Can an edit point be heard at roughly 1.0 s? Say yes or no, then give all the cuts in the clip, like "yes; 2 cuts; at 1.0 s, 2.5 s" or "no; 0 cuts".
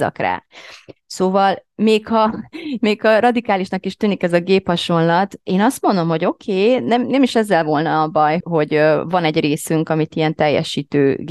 no; 1 cut; at 8.4 s